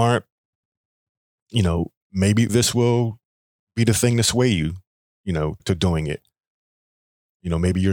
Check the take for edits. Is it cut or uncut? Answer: cut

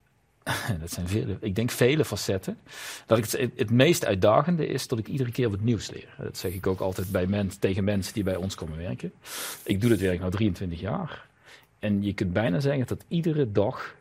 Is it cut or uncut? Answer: uncut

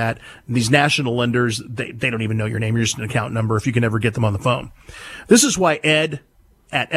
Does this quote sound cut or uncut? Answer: uncut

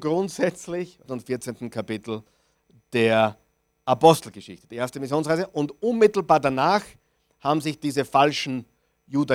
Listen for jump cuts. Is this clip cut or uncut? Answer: cut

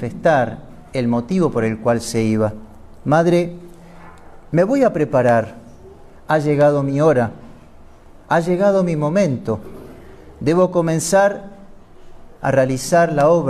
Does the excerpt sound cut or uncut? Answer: uncut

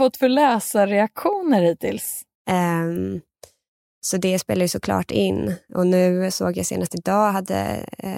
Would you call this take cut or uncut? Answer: cut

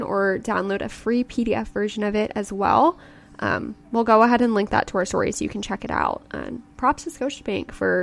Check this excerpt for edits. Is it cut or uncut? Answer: uncut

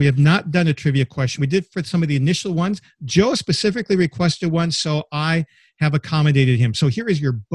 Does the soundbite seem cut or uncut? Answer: uncut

